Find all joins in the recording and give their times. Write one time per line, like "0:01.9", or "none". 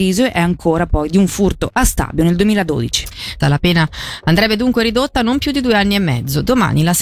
0:03.4